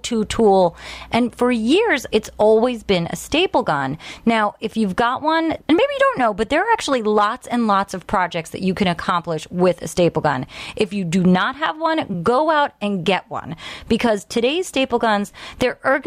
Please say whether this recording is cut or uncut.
cut